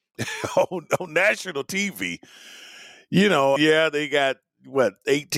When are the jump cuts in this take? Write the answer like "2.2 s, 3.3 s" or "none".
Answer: 3.6 s

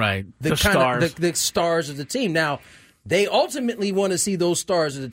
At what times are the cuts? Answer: none

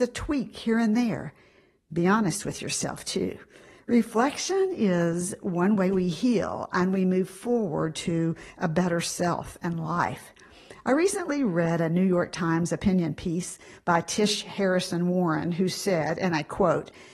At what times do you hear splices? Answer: none

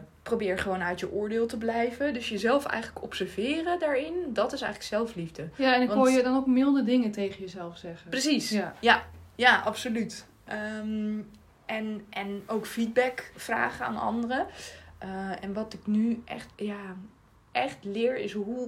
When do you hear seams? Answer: 16.5 s

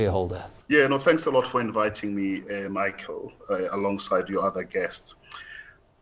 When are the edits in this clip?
none

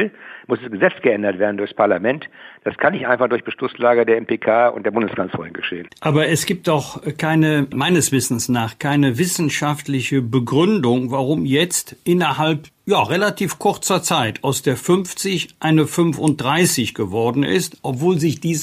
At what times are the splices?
7.7 s

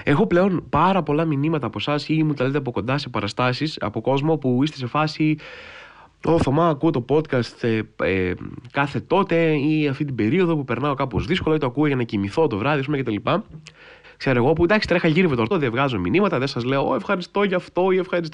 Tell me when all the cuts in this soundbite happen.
14.0 s, 15.5 s

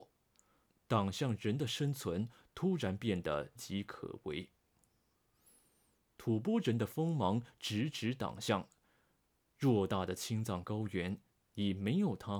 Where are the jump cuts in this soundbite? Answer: 3.6 s

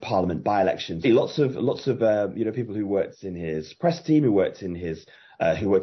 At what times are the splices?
1.0 s

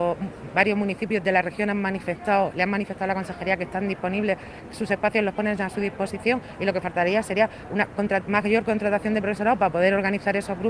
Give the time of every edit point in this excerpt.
none

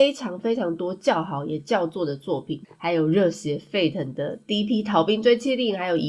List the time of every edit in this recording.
2.6 s

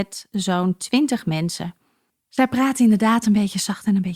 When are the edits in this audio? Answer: 2.1 s

